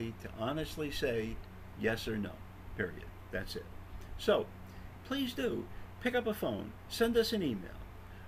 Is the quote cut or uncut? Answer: cut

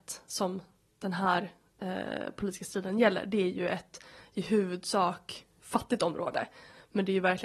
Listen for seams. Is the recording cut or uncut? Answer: uncut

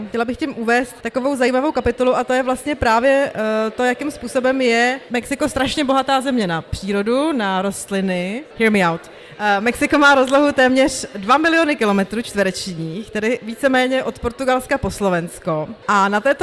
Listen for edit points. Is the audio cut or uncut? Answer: uncut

